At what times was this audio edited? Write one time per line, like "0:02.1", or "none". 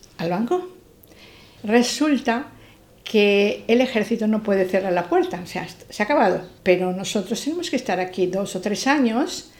0:01.6
0:06.6